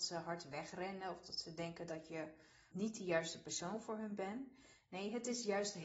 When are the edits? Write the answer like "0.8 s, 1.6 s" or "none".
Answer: 2.7 s